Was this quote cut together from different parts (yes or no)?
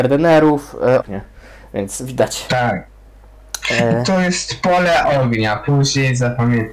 yes